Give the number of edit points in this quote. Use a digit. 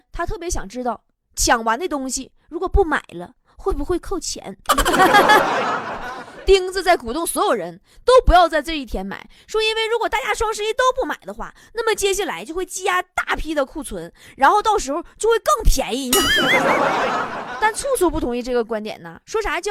0